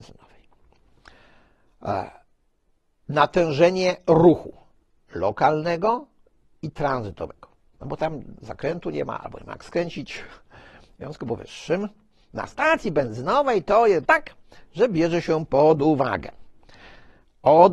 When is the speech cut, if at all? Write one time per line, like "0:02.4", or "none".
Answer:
0:07.7
0:14.0